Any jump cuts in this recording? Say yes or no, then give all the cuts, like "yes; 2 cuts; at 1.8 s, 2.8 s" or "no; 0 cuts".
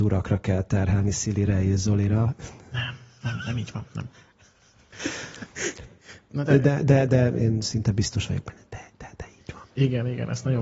yes; 1 cut; at 9.7 s